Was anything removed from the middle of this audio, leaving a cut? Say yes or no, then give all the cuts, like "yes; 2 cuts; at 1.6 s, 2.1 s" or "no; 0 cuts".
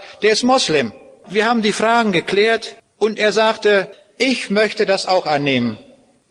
yes; 1 cut; at 1.2 s